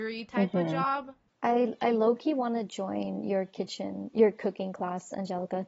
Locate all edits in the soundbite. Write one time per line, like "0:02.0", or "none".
0:01.3